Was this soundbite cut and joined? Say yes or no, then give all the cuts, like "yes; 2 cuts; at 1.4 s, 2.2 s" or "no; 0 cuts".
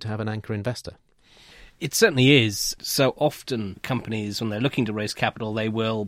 yes; 1 cut; at 2.8 s